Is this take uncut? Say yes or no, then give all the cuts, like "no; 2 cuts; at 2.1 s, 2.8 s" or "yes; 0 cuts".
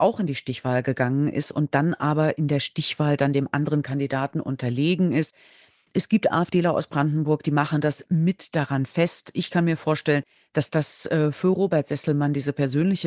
yes; 0 cuts